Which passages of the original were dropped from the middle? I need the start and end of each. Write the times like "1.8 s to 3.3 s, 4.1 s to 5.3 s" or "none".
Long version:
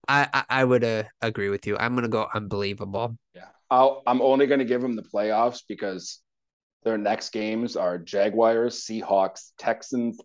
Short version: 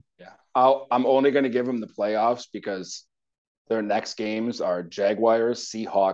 none